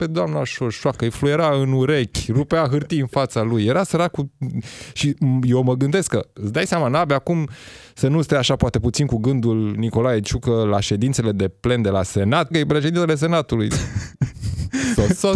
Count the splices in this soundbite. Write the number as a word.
two